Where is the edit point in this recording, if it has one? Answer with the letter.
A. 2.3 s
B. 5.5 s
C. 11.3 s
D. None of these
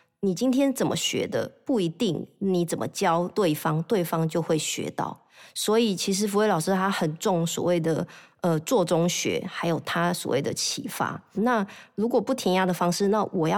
C